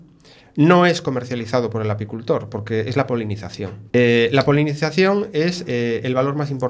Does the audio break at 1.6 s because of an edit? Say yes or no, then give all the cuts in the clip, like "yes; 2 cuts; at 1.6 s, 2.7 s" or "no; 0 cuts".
no; 2 cuts; at 3.9 s, 5.7 s